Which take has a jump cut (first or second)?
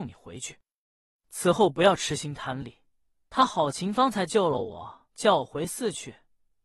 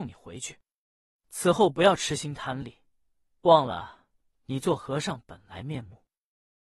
first